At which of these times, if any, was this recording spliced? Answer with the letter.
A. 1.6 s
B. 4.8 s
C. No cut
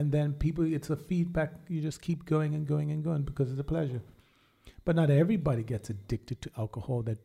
C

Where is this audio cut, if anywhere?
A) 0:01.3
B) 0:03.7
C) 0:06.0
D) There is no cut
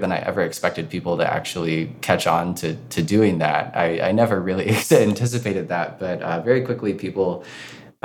D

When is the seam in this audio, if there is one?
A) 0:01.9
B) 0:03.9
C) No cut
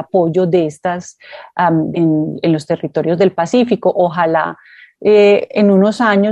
A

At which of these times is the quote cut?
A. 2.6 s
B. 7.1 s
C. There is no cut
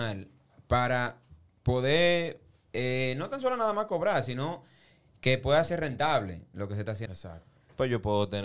B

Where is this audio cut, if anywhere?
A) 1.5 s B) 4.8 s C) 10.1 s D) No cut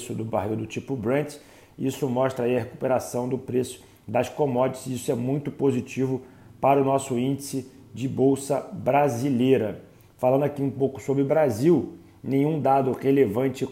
D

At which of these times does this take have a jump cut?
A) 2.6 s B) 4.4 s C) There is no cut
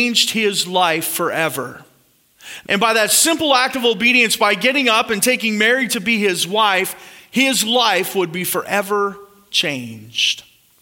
A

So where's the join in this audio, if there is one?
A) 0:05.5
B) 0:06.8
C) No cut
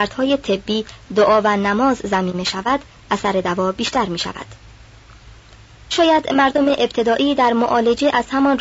C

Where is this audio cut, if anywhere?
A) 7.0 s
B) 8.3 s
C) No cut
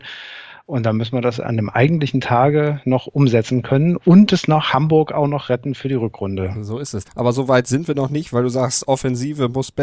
A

